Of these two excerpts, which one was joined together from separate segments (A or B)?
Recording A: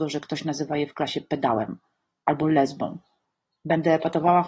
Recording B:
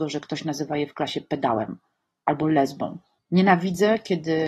B